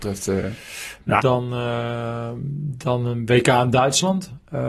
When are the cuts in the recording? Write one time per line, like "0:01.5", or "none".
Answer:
0:01.2